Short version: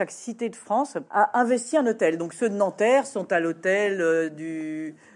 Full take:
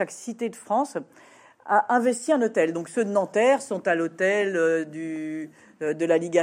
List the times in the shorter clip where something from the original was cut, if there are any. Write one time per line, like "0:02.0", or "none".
0:01.1